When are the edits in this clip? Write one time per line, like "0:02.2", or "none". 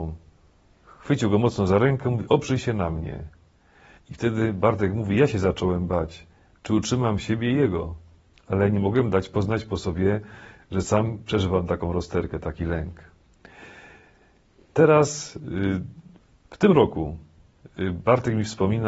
0:04.0

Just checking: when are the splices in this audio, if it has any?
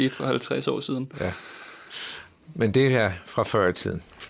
none

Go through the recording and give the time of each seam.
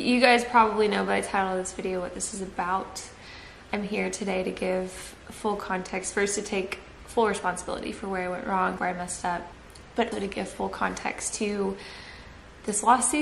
0:08.8
0:10.1

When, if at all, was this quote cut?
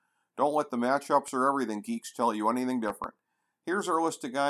none

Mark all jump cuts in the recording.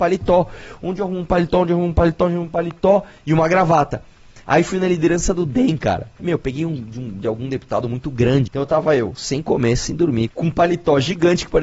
0:06.2
0:08.5
0:10.3

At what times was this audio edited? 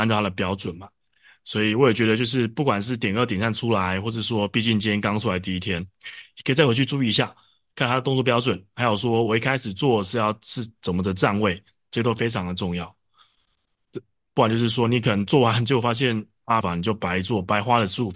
0:16.6

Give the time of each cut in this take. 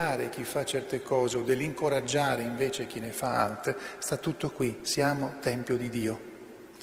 none

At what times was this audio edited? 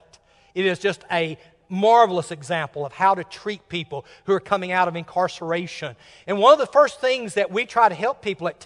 none

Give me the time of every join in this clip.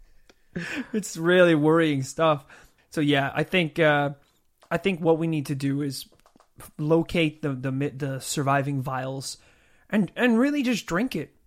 none

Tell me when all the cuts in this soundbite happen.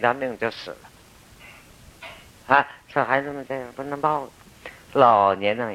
none

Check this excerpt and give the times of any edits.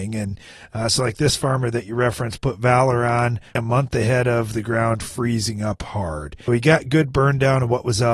0:03.6
0:06.5

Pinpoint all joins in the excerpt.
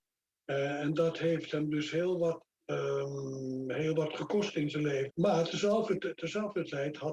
0:05.1

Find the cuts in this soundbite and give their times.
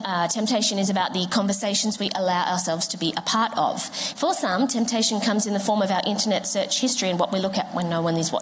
0:04.1

